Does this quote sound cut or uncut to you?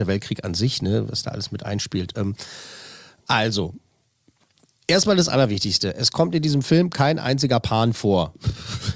uncut